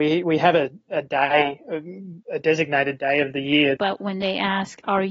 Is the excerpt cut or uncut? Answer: cut